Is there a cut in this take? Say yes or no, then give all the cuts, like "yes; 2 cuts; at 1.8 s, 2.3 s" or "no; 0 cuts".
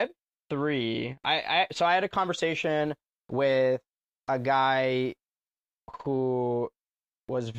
no; 0 cuts